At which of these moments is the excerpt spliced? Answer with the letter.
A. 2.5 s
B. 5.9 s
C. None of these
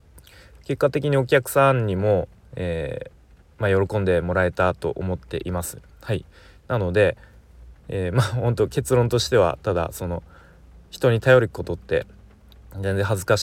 C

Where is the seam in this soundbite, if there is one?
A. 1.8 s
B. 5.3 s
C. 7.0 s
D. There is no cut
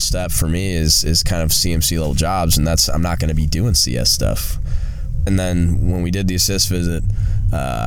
B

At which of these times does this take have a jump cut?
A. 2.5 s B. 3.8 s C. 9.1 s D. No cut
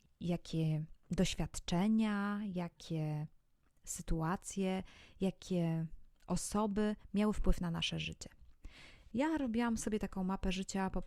C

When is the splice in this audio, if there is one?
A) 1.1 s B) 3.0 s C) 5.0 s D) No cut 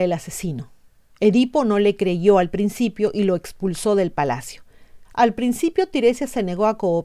C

